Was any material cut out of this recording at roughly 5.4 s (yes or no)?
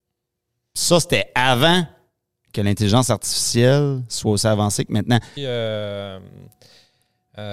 yes